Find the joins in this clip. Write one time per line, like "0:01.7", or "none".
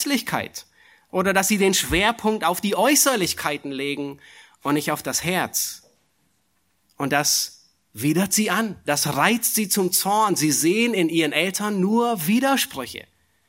none